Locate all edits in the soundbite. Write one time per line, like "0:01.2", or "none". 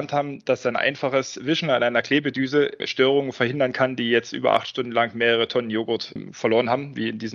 0:02.8